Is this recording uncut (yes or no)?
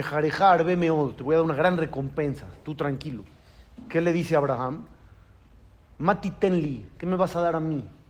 yes